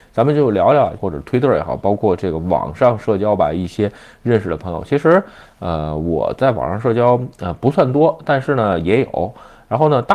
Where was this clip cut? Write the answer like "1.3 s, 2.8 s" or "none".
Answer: 1.0 s

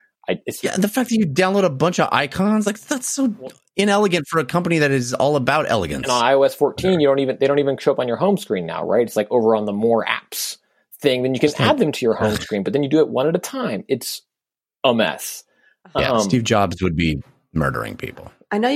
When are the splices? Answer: none

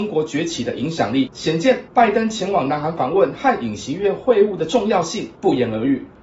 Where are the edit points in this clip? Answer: none

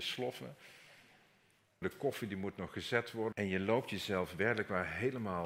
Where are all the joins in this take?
1.8 s, 3.3 s

